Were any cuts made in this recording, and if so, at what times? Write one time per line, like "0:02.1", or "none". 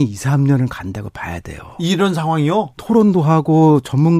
0:02.7